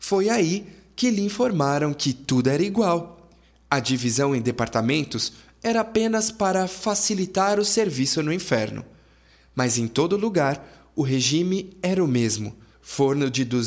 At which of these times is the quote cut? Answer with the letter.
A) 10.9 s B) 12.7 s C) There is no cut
B